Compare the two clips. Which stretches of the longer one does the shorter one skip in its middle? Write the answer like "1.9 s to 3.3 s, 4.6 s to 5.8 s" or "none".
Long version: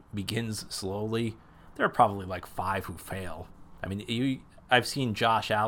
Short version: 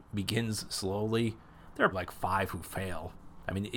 1.9 s to 2.3 s

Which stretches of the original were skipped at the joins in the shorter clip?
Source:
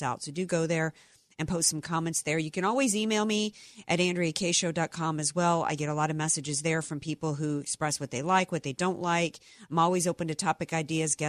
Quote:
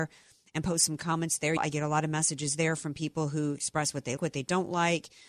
2.4 s to 5.6 s, 8.2 s to 8.5 s

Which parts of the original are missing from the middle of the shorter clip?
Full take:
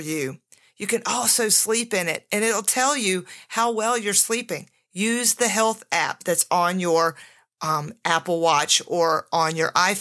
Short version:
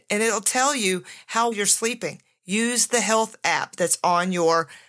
3.7 s to 4.0 s

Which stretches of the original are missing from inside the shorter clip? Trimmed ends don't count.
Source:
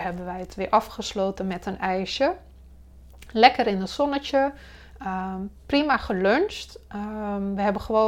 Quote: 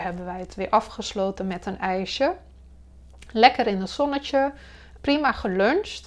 5.0 s to 5.6 s

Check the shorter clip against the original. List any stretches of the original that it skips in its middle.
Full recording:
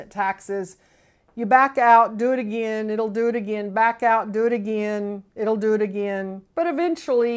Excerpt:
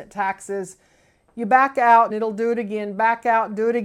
2.1 s to 2.9 s

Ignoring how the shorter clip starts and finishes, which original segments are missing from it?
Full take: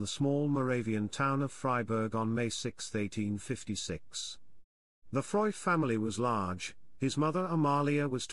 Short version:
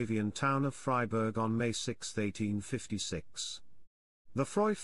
none

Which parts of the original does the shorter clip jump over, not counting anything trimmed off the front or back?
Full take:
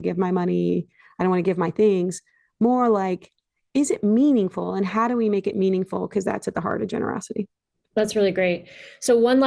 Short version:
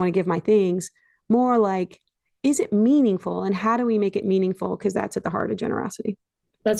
none

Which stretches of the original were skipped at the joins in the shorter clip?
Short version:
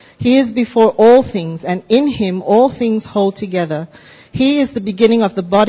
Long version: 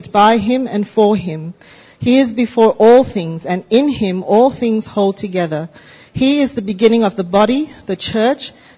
none

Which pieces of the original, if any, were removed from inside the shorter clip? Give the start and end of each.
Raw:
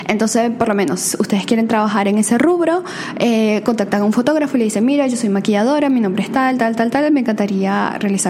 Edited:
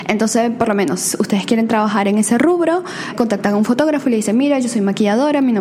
3.1 s to 3.6 s

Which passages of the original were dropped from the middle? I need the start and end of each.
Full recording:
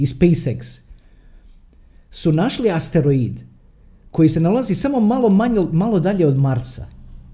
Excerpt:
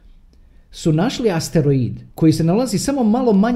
3.5 s to 4.1 s

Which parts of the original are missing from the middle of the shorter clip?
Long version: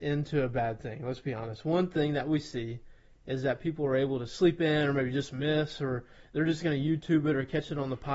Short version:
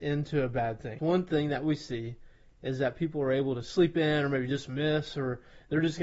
1.0 s to 1.6 s

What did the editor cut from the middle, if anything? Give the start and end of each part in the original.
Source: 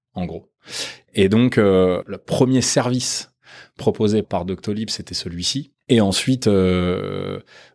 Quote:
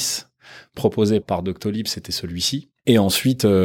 none

